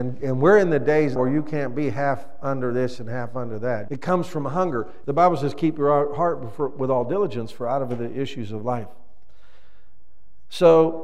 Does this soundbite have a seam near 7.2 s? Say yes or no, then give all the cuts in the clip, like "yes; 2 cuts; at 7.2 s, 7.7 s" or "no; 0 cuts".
no; 3 cuts; at 1.2 s, 3.9 s, 5.0 s